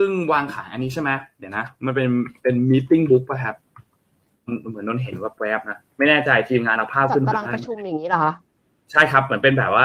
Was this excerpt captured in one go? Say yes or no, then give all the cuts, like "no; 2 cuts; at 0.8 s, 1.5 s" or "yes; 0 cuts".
yes; 0 cuts